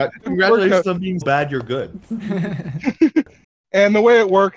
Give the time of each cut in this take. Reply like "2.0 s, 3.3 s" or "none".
1.2 s